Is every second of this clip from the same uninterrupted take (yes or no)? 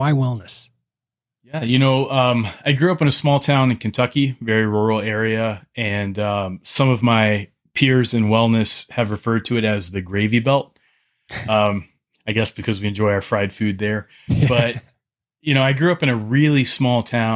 yes